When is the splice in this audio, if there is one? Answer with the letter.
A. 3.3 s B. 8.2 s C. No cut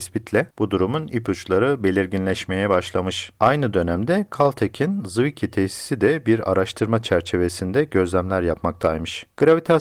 C